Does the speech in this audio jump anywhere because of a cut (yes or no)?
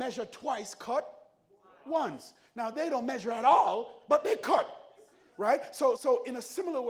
yes